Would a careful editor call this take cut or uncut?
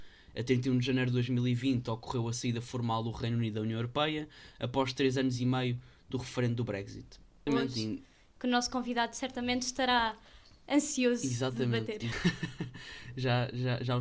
cut